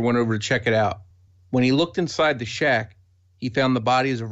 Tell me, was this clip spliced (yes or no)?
no